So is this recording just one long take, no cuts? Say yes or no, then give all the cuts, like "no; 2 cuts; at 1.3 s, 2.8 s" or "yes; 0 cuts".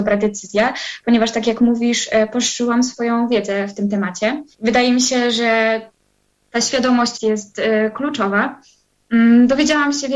no; 2 cuts; at 4.5 s, 7.1 s